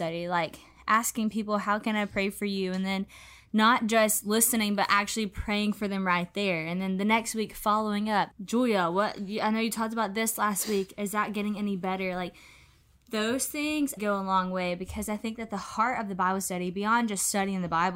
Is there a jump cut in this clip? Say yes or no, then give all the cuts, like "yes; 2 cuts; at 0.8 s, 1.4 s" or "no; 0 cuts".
yes; 2 cuts; at 8.3 s, 14.0 s